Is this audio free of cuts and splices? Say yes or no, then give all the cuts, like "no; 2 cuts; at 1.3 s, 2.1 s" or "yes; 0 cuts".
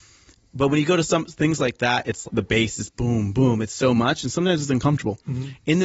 no; 1 cut; at 2.2 s